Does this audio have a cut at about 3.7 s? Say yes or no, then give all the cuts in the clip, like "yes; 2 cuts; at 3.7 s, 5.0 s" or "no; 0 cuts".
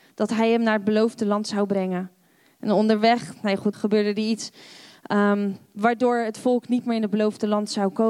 yes; 1 cut; at 3.7 s